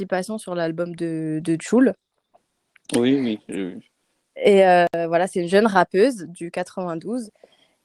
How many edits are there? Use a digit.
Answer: 0